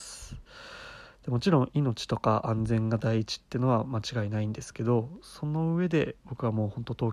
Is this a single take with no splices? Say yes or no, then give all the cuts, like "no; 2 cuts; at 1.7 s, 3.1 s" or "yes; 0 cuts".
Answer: no; 1 cut; at 6.2 s